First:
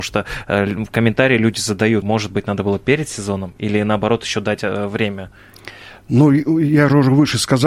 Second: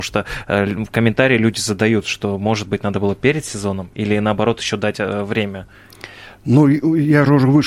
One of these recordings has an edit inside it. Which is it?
first; 1 cut; at 2.0 s

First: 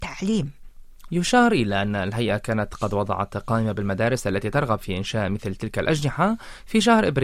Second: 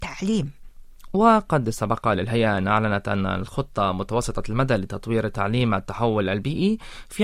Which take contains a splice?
first; 1 cut; at 1.1 s

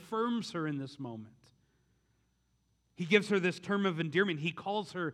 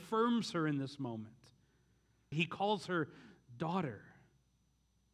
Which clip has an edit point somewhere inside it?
second; 1 cut; at 2.3 s

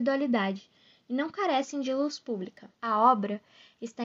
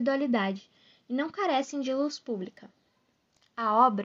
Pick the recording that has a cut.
first; 1 cut; at 2.7 s

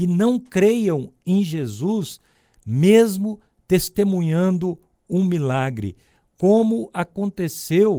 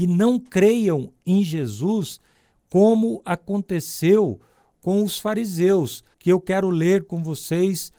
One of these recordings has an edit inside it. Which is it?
second; 2 cuts; at 2.5 s, 6.1 s

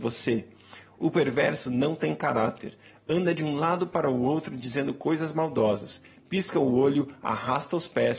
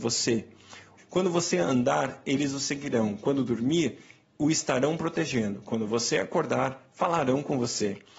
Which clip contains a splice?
second; 1 cut; at 1.0 s

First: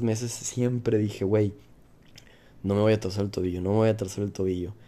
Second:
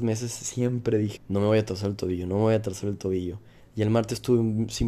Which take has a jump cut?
second; 1 cut; at 1.2 s

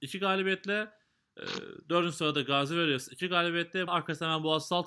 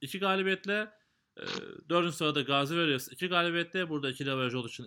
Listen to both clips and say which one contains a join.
first; 1 cut; at 3.9 s

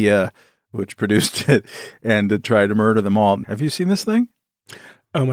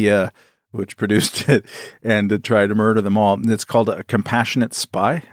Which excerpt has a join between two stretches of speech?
first; 1 cut; at 3.4 s

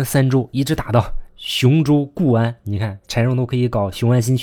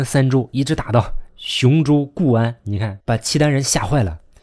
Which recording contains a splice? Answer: second; 1 cut; at 3.0 s

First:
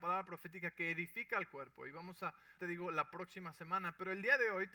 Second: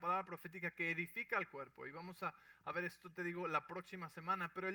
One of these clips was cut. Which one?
first; 1 cut; at 2.6 s

